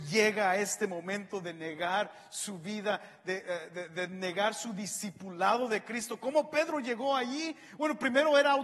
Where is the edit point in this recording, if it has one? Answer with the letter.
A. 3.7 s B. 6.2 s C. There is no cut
C